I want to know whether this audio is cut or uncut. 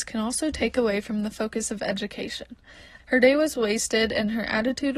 cut